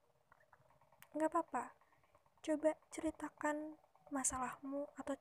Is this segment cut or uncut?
cut